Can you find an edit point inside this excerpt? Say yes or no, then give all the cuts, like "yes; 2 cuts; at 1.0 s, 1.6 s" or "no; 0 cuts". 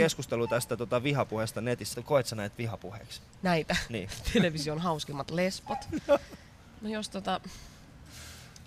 yes; 1 cut; at 1.9 s